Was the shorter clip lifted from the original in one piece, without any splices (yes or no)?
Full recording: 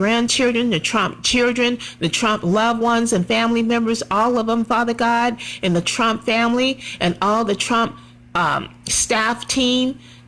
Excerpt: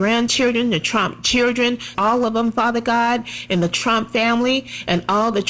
no